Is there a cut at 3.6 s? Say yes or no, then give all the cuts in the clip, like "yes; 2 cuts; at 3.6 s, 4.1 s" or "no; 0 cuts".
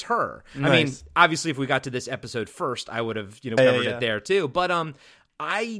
yes; 1 cut; at 3.6 s